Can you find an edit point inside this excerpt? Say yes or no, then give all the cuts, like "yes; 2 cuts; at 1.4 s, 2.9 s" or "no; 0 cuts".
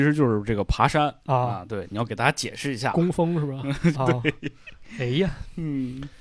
yes; 1 cut; at 3.9 s